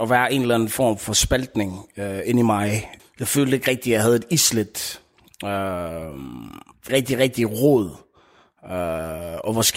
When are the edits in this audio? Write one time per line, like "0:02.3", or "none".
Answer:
0:03.0
0:06.9